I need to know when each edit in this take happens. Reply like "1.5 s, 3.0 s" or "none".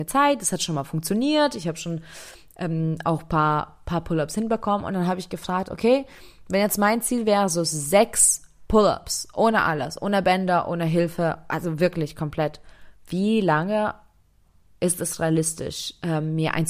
none